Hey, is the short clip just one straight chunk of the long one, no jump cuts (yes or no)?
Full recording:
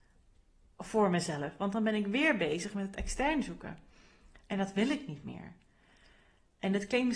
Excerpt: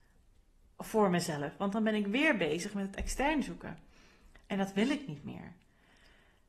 yes